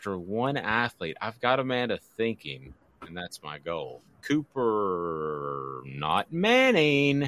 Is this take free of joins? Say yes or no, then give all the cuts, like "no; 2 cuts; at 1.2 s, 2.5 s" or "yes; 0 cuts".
yes; 0 cuts